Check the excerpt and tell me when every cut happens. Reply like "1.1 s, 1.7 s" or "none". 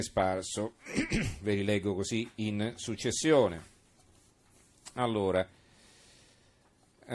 none

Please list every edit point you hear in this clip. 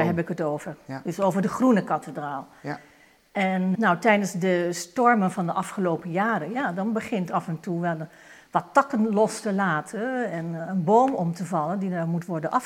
3.7 s

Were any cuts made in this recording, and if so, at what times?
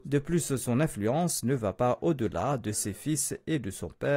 none

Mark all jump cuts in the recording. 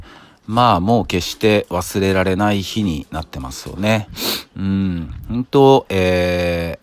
none

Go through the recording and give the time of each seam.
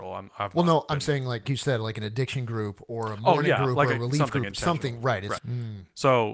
1.4 s, 5.4 s

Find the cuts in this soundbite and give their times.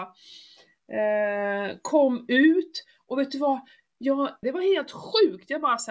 4.4 s

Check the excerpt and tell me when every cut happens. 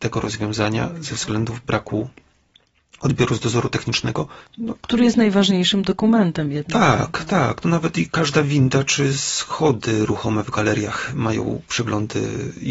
none

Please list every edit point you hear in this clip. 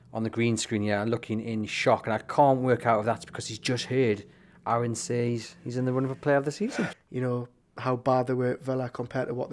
6.9 s

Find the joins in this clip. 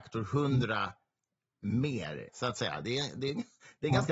2.3 s

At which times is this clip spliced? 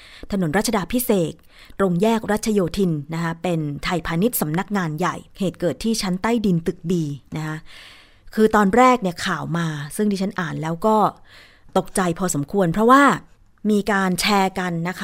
5.3 s

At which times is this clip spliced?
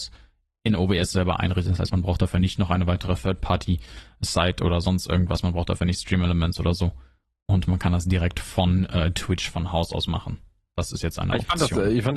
none

